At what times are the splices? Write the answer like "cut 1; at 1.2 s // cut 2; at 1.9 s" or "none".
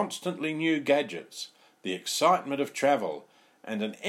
none